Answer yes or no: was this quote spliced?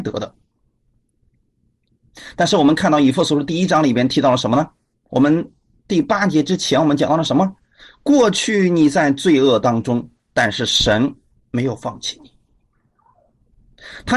yes